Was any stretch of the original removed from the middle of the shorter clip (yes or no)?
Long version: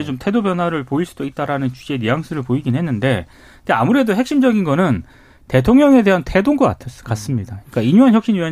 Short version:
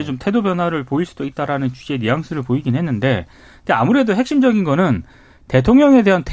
no